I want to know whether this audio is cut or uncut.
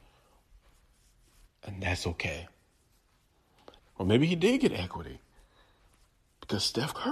cut